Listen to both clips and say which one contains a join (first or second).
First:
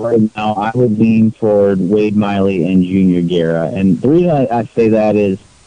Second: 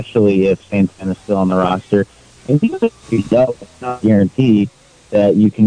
second